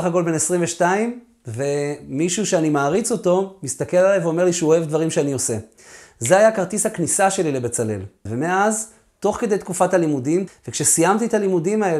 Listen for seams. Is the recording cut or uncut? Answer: cut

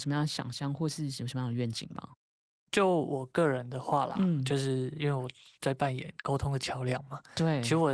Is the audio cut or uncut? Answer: uncut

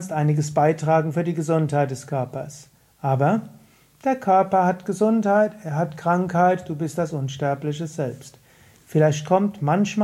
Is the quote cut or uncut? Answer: uncut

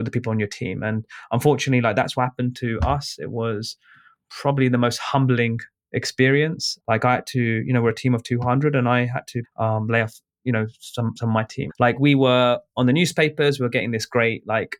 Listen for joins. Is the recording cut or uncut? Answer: cut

